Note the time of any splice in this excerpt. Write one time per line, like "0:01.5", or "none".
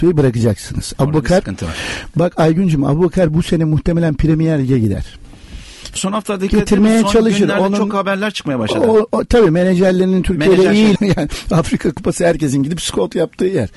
0:06.0
0:11.0